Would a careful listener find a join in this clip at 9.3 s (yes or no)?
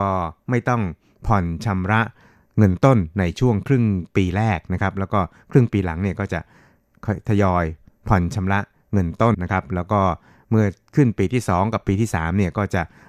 yes